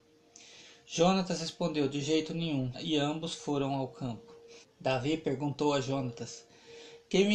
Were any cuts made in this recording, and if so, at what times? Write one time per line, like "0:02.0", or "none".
0:02.7
0:04.6